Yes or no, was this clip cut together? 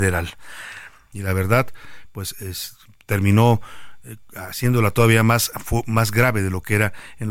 yes